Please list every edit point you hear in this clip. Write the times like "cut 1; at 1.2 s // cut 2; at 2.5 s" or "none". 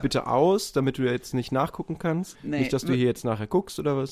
cut 1; at 2.3 s